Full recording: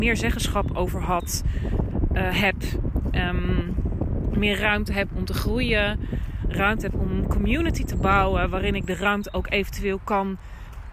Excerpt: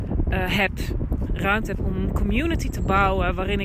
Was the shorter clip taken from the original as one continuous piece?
no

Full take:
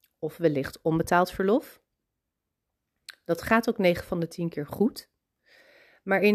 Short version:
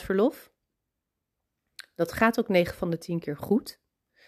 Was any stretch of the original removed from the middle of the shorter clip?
no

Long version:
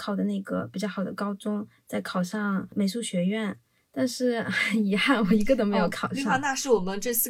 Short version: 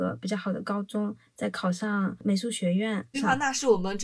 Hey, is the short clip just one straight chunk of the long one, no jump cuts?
no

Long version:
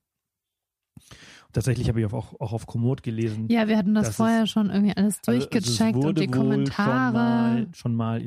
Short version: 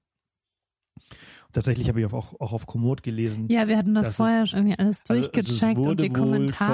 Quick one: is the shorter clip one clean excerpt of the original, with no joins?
no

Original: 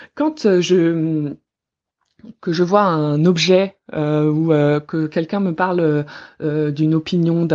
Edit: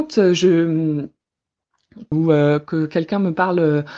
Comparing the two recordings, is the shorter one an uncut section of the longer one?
no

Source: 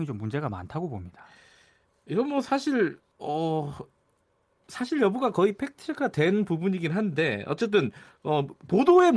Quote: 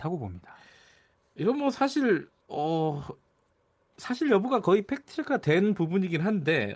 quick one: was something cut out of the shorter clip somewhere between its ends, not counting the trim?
no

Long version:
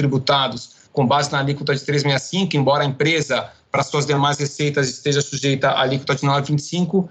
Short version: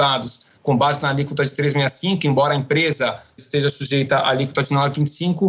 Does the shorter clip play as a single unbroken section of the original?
no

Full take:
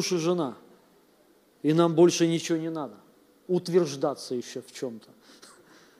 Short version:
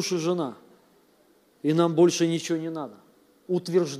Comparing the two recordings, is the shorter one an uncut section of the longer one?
yes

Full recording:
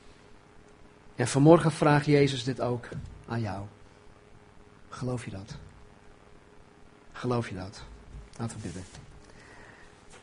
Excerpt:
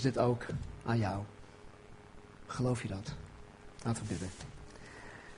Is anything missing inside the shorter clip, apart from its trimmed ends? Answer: yes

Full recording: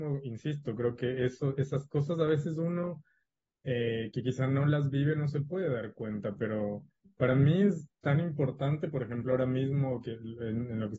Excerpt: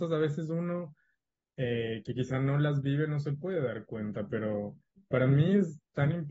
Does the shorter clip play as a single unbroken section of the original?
yes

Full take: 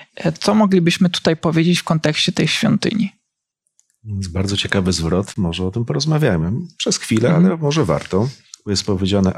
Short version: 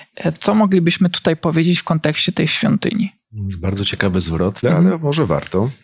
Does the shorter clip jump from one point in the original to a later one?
yes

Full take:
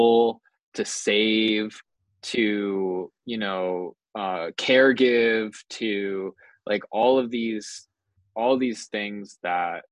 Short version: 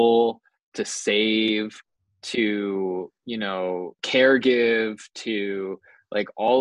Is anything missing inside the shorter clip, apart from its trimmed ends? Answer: yes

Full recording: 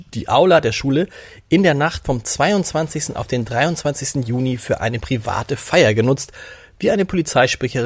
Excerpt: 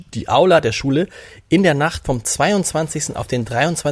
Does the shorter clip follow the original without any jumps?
yes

